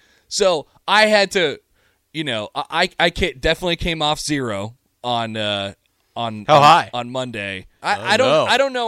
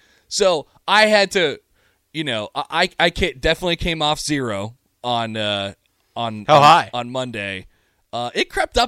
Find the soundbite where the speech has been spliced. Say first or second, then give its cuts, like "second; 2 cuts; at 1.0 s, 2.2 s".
first; 1 cut; at 7.8 s